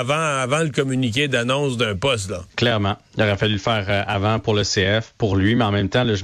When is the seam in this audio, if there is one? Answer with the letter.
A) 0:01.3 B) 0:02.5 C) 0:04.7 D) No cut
B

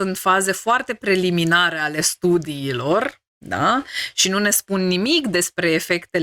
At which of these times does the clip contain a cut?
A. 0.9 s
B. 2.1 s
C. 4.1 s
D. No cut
D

